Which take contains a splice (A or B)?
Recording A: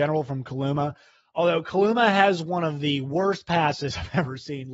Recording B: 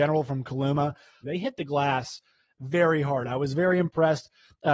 B